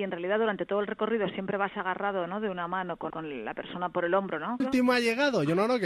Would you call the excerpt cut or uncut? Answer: cut